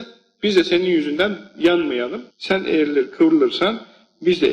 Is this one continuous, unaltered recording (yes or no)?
no